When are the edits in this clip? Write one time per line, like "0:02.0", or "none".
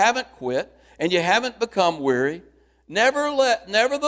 none